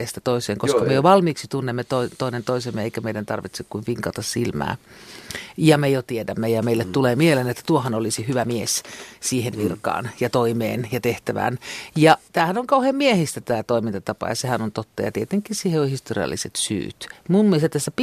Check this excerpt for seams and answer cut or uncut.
cut